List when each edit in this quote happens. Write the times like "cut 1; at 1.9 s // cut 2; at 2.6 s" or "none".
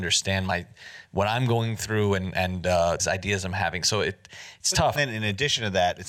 cut 1; at 3.0 s // cut 2; at 4.9 s